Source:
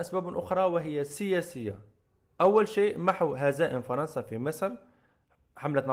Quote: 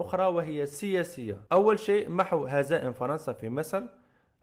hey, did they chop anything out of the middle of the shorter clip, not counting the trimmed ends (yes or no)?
yes